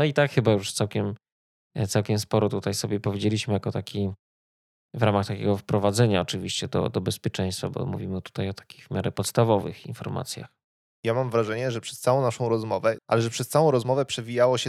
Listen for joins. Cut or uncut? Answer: cut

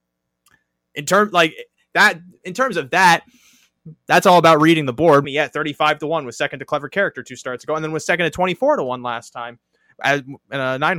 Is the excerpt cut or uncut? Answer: cut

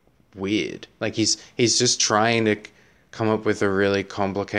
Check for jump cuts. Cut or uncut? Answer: uncut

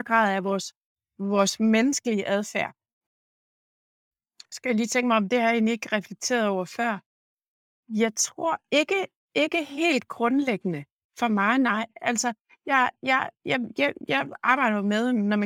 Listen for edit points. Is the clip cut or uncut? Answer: uncut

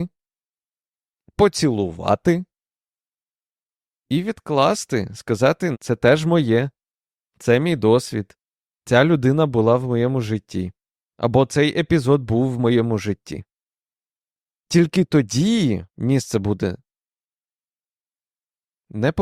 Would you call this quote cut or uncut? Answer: cut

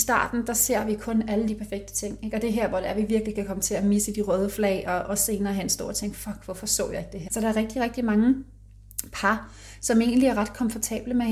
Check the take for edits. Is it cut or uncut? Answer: cut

